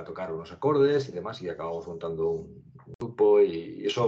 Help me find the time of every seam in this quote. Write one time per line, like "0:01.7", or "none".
none